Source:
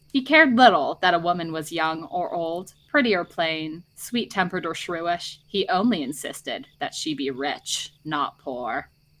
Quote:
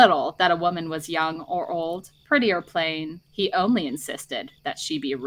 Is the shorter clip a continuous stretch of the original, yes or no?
no